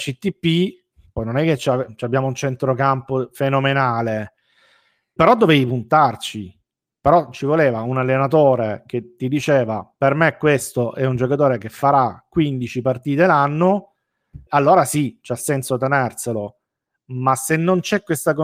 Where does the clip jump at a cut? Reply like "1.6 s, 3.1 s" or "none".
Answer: 1.2 s, 5.2 s, 14.5 s